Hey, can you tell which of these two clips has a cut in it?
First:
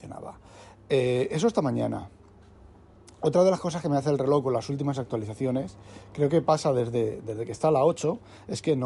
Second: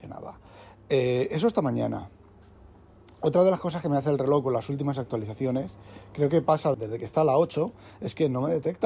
second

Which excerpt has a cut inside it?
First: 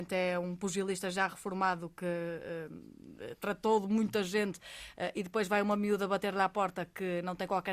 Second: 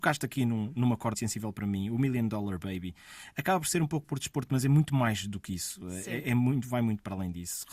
second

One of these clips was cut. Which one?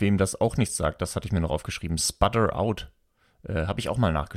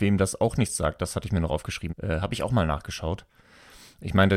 second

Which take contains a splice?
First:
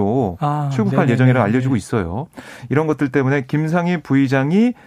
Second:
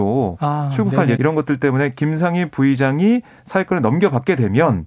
second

